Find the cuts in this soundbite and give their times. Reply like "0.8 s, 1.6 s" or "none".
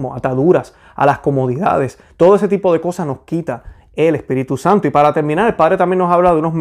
none